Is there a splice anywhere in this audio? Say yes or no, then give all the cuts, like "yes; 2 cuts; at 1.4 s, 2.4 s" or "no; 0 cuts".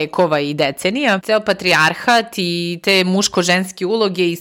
yes; 1 cut; at 1.2 s